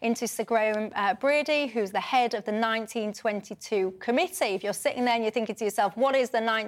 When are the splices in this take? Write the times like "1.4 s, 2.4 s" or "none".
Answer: none

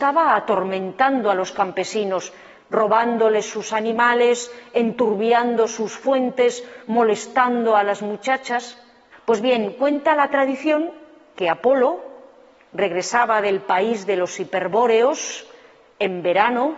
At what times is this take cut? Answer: 9.1 s

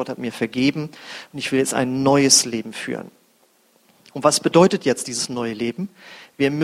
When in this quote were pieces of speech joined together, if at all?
none

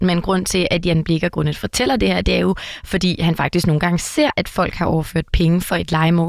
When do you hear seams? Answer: none

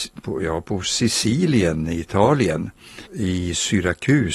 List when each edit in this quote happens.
3.1 s

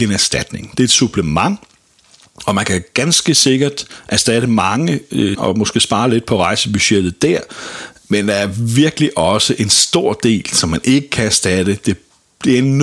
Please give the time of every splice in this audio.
5.3 s

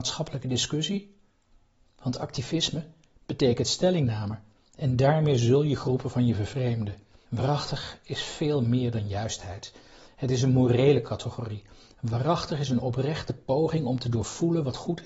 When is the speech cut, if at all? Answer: 7.2 s

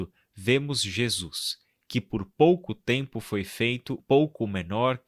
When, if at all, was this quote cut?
4.0 s

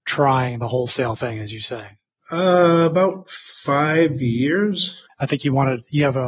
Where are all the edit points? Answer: 5.1 s

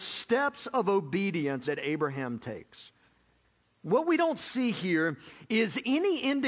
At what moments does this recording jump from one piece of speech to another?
1.6 s

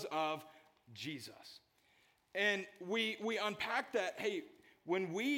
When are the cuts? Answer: none

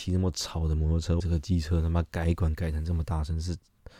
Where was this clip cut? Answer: 1.2 s

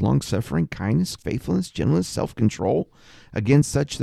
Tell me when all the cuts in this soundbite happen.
1.2 s

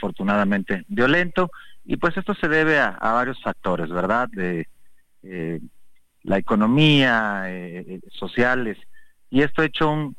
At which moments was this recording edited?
8.1 s

